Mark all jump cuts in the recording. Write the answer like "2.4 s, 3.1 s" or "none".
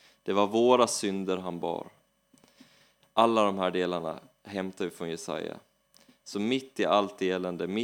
none